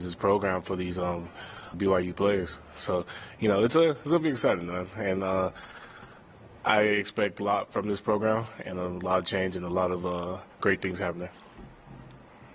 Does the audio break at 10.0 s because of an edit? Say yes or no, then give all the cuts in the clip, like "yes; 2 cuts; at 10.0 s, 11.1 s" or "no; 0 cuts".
no; 1 cut; at 1.7 s